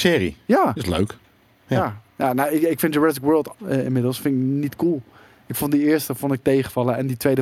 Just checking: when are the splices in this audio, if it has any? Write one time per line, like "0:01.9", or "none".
0:03.5